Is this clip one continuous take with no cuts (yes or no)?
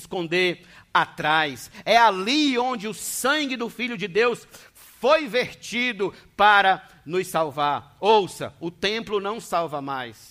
yes